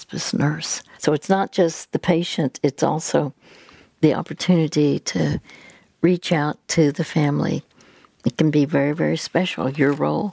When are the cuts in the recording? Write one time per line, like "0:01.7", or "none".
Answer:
0:01.0
0:08.1